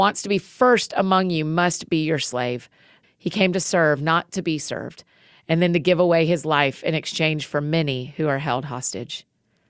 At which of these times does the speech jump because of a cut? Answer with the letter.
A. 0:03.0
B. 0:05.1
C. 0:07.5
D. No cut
A